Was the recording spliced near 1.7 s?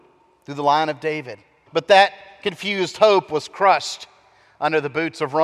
yes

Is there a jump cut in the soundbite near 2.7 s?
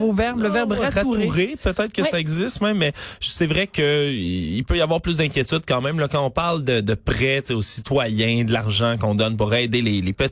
no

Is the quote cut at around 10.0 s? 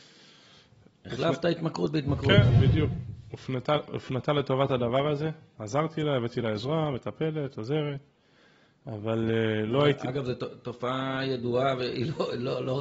no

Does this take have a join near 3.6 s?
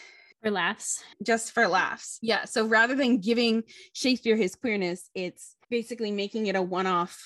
no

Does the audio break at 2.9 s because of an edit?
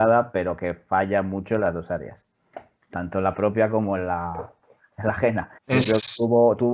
no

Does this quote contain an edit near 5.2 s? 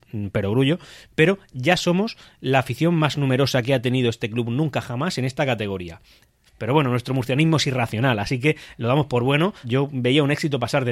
no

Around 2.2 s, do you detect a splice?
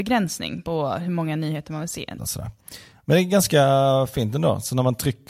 yes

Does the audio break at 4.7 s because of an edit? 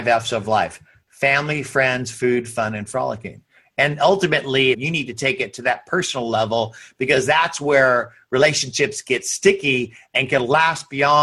yes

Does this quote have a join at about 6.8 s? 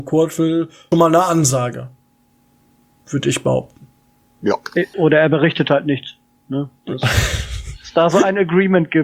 no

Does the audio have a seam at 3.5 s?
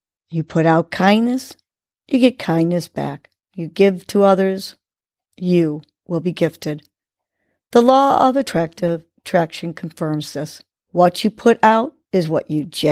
yes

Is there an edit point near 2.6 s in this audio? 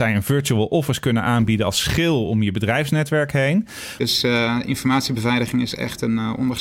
no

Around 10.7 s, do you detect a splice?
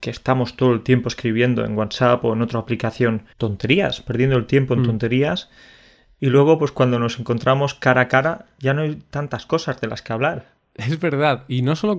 no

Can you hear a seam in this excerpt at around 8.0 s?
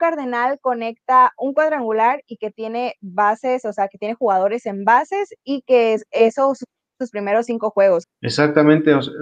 yes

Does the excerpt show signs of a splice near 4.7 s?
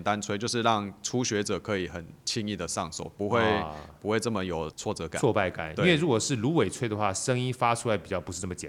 yes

